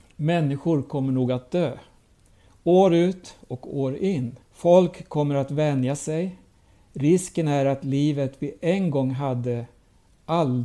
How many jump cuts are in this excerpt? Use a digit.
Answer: 1